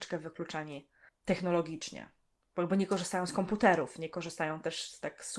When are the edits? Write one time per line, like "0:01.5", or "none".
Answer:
none